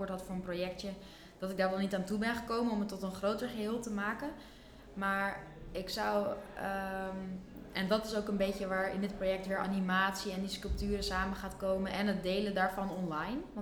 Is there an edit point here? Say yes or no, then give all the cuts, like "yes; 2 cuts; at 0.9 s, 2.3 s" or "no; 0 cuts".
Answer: no; 0 cuts